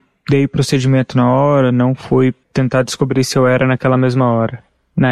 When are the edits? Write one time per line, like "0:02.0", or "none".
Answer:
0:02.4